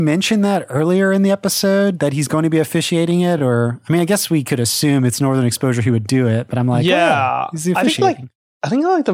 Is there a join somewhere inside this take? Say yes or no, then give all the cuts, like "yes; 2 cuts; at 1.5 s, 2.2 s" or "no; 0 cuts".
no; 0 cuts